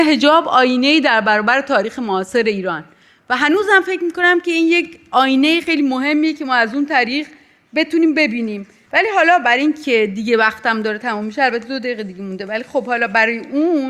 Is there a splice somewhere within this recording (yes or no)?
yes